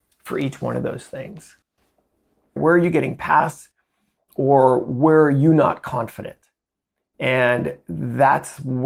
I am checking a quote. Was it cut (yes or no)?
yes